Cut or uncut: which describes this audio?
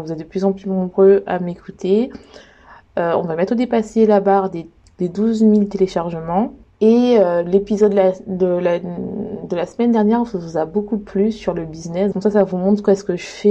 cut